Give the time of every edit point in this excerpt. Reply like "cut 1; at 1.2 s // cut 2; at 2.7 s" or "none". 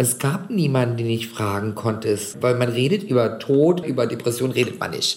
cut 1; at 2.3 s // cut 2; at 3.8 s